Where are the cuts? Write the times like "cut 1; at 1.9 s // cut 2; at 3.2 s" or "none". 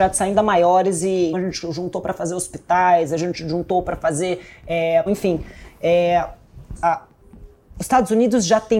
cut 1; at 1.3 s // cut 2; at 5.1 s // cut 3; at 6.8 s